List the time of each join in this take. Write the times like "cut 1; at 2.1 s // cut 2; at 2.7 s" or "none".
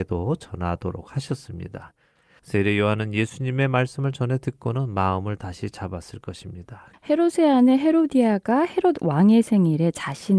cut 1; at 2.4 s // cut 2; at 6.9 s